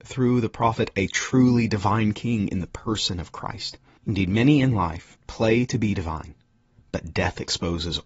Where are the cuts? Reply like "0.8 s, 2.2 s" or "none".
4.0 s